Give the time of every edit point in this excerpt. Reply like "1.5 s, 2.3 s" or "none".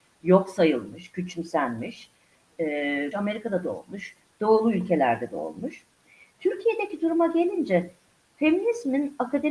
3.1 s